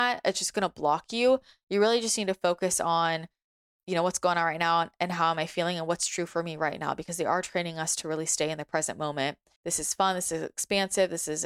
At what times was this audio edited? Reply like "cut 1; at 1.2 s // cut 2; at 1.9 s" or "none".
cut 1; at 9.6 s